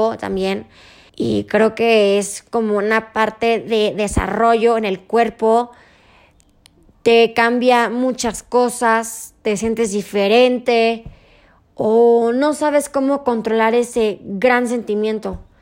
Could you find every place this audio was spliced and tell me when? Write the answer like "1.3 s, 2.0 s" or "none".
1.1 s